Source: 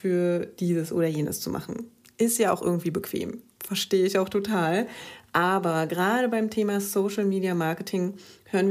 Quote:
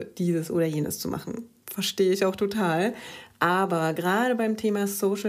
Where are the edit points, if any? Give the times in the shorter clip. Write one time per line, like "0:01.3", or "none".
0:01.6